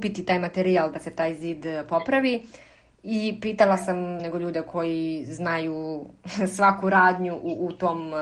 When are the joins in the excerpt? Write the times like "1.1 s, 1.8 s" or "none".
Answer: 4.2 s

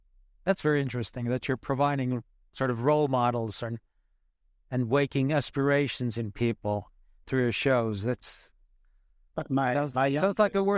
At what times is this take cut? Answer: none

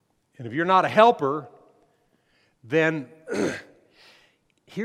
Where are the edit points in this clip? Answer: none

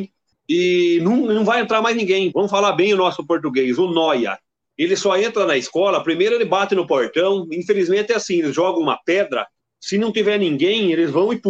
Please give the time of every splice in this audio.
2.3 s

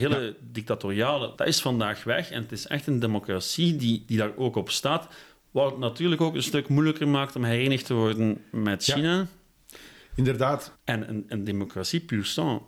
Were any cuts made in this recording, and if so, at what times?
1.3 s, 10.7 s

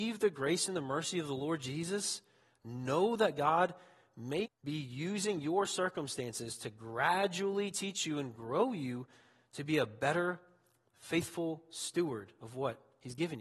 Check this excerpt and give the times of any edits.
4.4 s

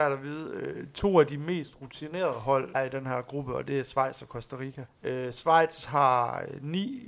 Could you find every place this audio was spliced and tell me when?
2.7 s, 4.9 s

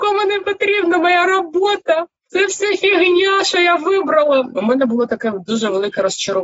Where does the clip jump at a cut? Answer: none

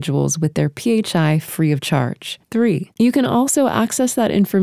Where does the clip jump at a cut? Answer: 2.9 s

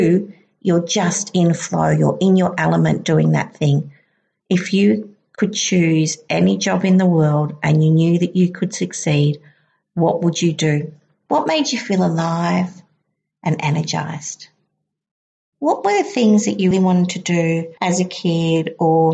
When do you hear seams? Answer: 11.3 s, 16.7 s

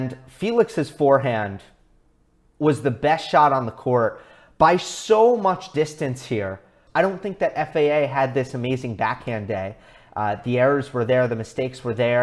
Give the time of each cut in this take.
6.9 s

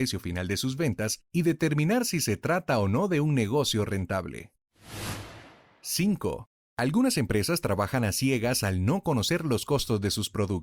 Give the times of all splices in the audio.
6.6 s

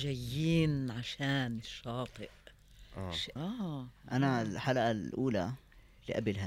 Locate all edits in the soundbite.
3.4 s

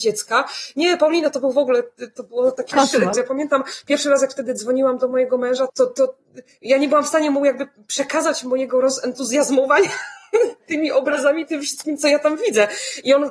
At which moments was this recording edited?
3.1 s, 5.7 s

